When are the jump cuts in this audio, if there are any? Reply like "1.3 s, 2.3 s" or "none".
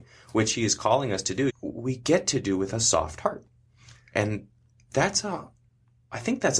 1.5 s